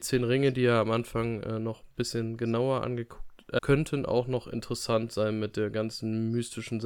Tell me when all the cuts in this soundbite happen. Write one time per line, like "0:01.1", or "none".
0:03.6